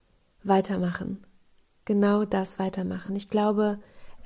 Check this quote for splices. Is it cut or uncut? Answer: uncut